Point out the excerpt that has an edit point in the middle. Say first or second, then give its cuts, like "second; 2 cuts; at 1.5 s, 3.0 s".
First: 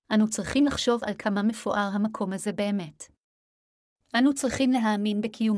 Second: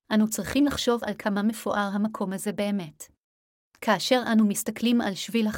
second; 1 cut; at 3.7 s